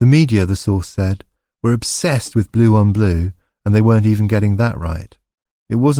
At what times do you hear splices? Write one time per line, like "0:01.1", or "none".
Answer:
none